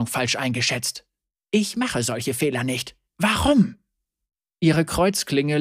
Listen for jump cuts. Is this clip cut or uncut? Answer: cut